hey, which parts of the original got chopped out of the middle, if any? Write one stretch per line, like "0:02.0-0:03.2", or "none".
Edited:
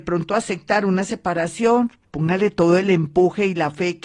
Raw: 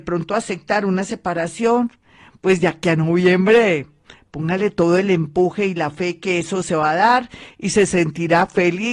0:02.0-0:04.2